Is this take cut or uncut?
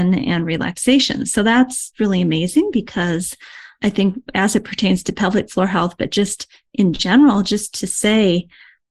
uncut